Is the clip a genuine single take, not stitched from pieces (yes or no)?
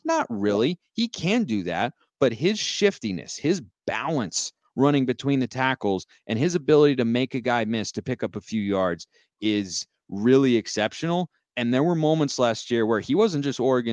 yes